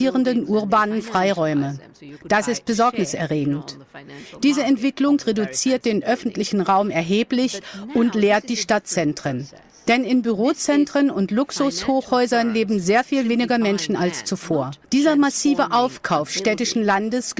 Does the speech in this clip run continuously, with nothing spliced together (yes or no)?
no